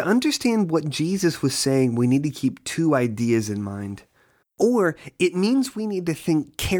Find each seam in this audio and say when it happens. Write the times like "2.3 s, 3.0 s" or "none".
4.4 s